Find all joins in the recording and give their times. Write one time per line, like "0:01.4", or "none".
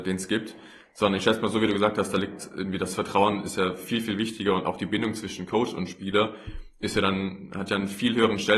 none